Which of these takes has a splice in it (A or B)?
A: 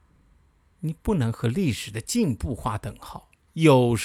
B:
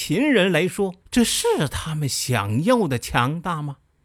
B